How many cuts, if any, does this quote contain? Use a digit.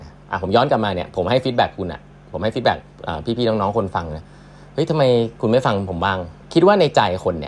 1